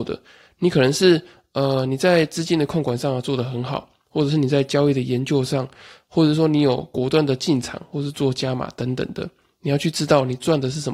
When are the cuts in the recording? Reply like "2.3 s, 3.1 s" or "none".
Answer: none